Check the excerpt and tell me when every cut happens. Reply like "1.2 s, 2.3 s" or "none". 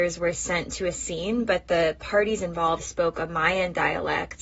2.8 s